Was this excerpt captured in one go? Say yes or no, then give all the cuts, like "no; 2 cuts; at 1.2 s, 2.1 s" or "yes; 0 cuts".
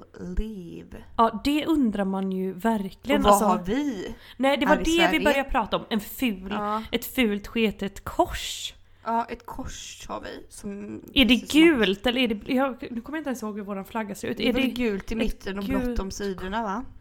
yes; 0 cuts